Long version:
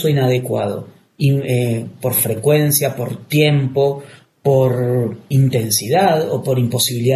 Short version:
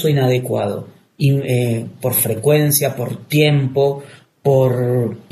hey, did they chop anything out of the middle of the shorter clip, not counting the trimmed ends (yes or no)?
no